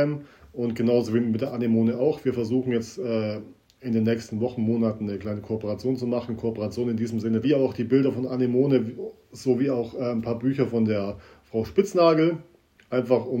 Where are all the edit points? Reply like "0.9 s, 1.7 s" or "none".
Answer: 7.4 s